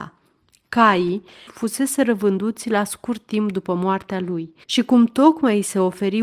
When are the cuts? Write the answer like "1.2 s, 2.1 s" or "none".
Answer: 1.5 s, 4.6 s